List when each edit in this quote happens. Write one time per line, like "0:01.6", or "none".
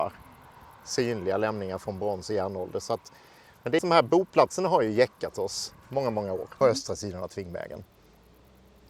0:03.8
0:06.6